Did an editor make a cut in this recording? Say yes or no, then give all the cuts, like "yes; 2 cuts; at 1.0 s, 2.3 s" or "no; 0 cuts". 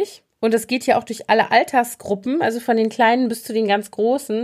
no; 0 cuts